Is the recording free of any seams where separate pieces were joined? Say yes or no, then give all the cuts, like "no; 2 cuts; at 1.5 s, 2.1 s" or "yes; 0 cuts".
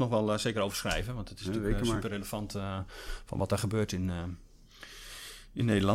yes; 0 cuts